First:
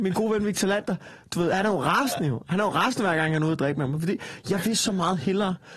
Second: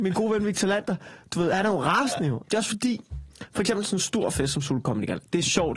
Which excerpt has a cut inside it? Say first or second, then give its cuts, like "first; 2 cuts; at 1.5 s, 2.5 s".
second; 1 cut; at 2.4 s